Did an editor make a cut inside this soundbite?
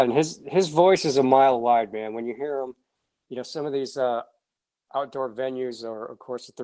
no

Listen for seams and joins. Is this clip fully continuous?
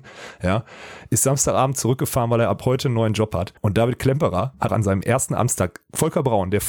no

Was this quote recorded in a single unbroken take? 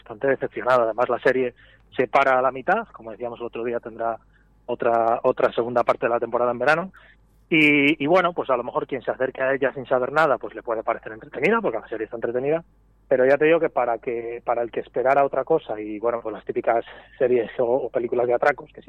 yes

